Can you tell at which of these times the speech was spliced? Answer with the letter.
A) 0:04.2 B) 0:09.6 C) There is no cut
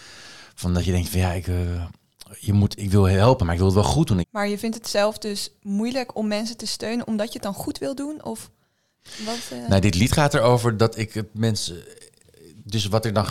A